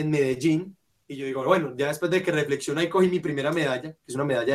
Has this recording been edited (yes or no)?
no